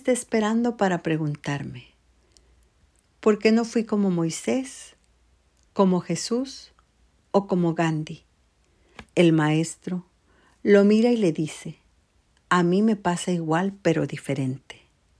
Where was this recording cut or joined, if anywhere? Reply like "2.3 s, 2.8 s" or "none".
9.1 s